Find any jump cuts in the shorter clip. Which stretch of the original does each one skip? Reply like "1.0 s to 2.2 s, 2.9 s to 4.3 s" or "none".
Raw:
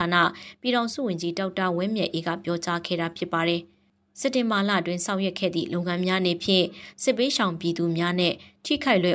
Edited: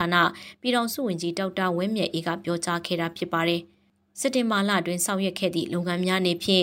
none